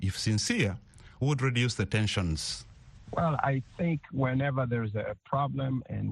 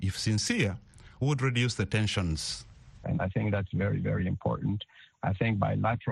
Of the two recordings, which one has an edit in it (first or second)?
second